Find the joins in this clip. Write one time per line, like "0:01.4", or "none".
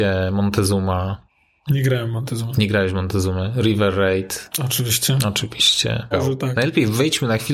0:06.1